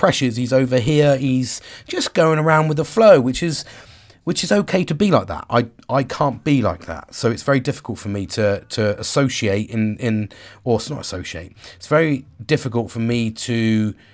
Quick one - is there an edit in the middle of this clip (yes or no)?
no